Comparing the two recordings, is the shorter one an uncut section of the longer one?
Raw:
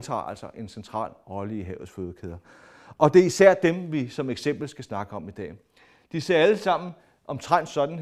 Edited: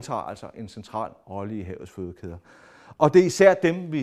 yes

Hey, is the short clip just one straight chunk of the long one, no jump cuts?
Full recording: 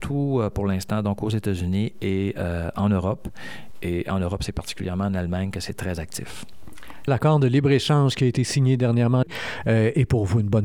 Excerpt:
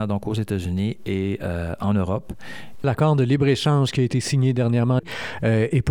no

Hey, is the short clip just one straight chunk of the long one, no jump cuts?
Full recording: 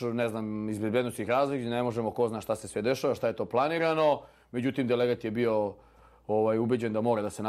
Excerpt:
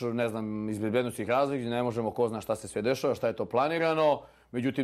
yes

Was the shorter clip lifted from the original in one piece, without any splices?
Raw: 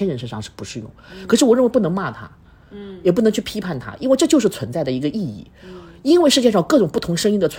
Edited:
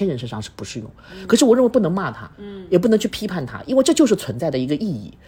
no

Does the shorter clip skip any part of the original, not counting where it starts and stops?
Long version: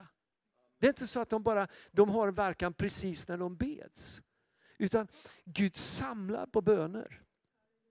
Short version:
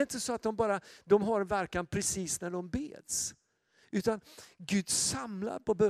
no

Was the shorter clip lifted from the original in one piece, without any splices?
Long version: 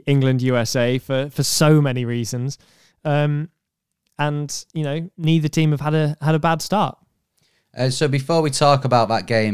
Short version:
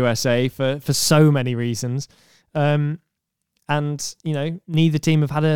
yes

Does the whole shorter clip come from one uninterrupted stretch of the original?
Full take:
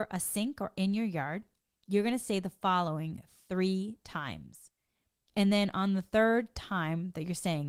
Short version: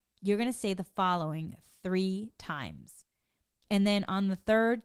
yes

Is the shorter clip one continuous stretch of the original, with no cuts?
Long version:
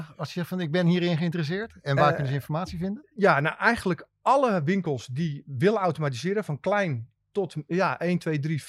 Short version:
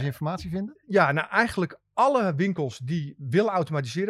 yes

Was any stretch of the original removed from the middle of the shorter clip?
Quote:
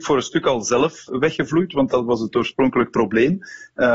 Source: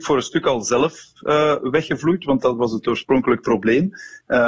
yes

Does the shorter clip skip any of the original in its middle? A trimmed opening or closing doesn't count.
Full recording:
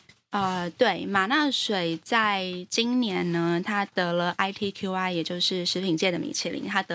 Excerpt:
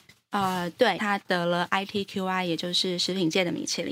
yes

